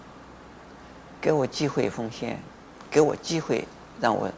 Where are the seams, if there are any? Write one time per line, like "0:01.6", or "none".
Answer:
none